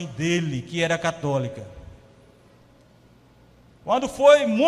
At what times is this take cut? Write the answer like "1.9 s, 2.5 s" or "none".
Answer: 3.7 s